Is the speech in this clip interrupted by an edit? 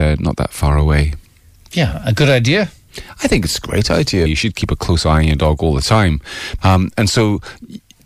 yes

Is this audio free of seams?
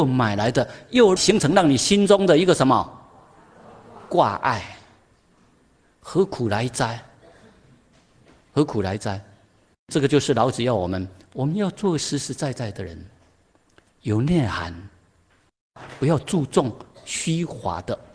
no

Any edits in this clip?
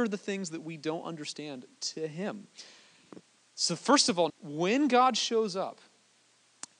yes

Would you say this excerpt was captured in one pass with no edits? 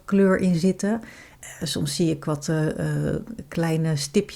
yes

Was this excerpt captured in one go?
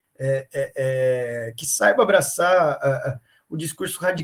yes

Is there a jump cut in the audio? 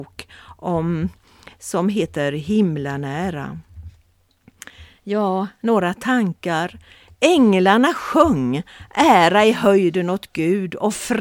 no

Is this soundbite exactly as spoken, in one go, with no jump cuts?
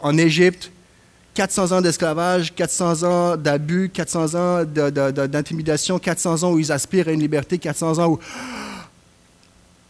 yes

